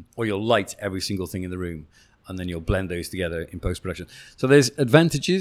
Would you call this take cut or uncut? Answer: uncut